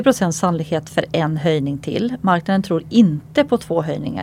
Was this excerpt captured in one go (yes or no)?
yes